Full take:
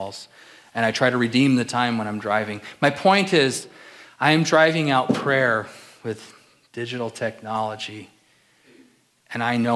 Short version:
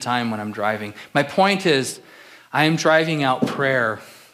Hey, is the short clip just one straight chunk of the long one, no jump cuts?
yes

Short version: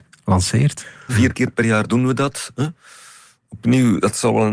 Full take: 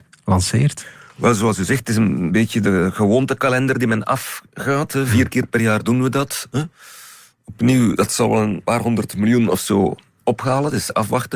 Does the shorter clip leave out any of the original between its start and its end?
yes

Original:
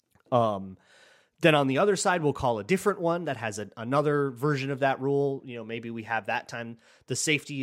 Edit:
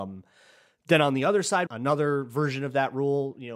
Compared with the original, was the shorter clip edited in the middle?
yes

